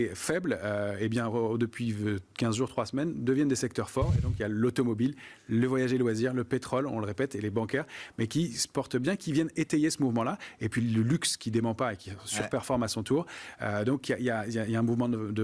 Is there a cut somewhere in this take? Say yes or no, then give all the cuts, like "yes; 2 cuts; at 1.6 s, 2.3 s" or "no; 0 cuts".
no; 0 cuts